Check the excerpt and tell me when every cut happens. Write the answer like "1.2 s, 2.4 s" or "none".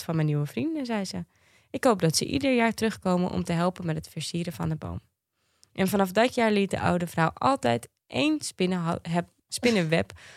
9.4 s